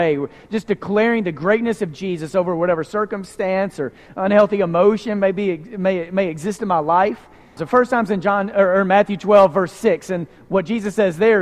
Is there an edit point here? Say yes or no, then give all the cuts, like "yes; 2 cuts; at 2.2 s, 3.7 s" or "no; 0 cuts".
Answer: yes; 1 cut; at 7.6 s